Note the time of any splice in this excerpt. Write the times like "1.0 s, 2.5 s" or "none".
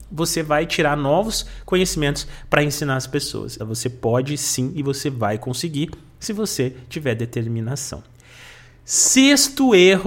3.6 s